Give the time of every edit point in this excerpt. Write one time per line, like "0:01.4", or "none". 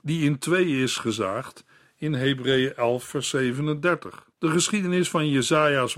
0:04.3